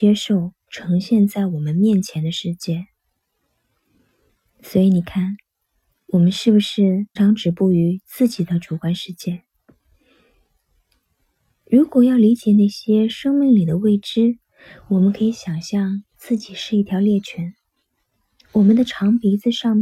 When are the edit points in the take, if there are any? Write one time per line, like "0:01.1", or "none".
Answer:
0:07.2